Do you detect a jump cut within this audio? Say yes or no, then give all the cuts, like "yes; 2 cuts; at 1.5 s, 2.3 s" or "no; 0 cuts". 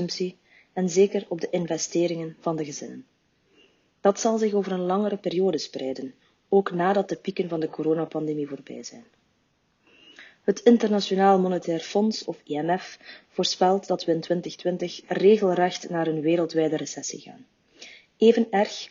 no; 0 cuts